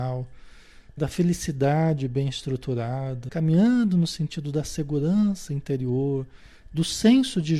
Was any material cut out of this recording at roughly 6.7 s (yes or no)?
yes